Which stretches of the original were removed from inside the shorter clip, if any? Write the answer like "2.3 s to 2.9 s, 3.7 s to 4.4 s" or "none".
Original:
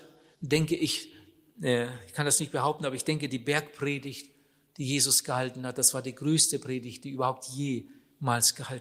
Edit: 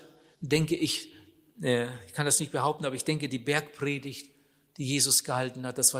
none